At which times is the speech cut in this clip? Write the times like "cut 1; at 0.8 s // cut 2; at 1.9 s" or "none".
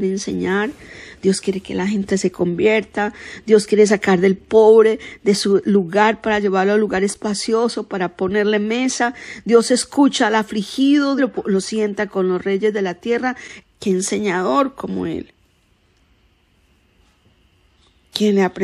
cut 1; at 11.2 s // cut 2; at 13.6 s